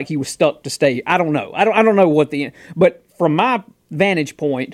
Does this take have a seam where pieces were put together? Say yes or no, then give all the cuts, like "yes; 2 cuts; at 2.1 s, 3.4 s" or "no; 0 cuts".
no; 0 cuts